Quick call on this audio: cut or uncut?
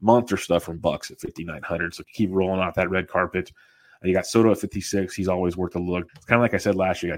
cut